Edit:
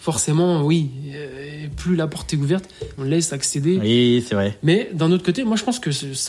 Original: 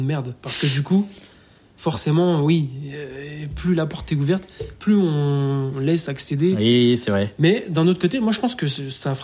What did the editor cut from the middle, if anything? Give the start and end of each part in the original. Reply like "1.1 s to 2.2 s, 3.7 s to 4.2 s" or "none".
4.8 s to 5.7 s